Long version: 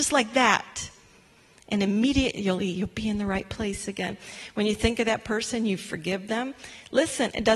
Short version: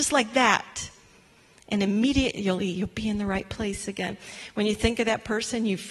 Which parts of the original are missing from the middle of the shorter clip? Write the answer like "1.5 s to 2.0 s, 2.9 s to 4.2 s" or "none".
none